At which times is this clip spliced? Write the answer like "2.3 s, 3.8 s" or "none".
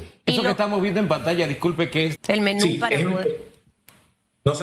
2.2 s